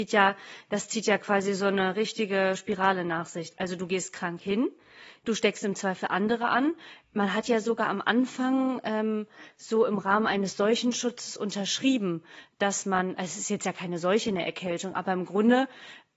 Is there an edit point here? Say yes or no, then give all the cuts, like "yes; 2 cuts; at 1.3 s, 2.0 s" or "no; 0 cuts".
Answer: no; 0 cuts